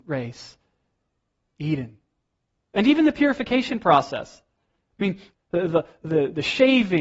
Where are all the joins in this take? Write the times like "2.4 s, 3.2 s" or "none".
2.6 s, 5.3 s